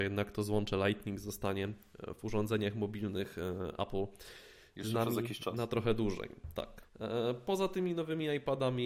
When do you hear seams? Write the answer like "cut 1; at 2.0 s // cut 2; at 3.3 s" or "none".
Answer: cut 1; at 6.8 s

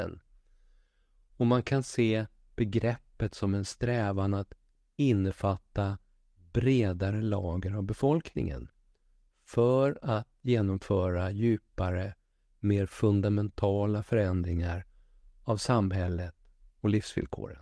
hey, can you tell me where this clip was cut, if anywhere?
none

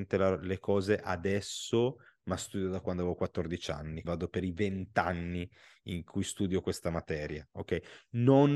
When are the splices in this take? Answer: cut 1; at 4.0 s

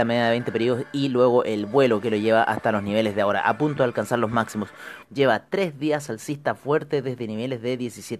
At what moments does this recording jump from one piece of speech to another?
cut 1; at 5.0 s

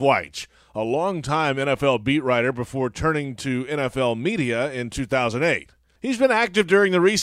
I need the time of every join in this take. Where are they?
none

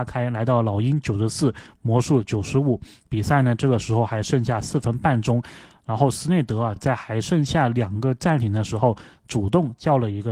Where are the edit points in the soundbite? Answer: none

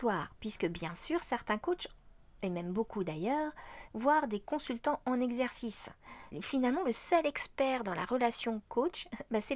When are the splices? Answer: cut 1; at 3.9 s // cut 2; at 6.3 s

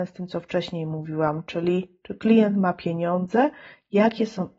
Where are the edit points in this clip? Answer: none

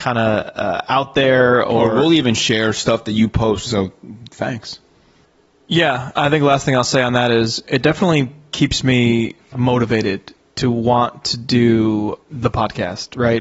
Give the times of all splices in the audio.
cut 1; at 3.7 s // cut 2; at 9.5 s // cut 3; at 12.3 s

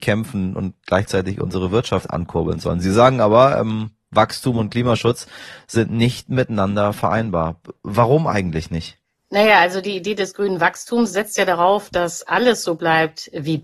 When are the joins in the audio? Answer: none

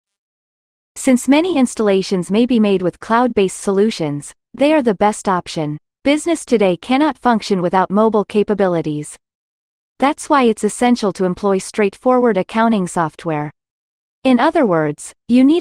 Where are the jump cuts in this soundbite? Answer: cut 1; at 5.9 s

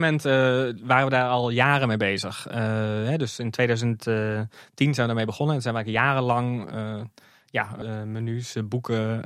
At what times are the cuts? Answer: cut 1; at 7.8 s

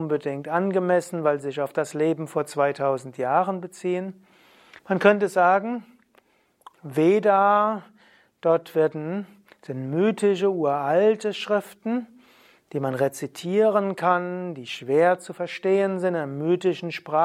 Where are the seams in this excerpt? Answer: cut 1; at 4.8 s // cut 2; at 6.7 s

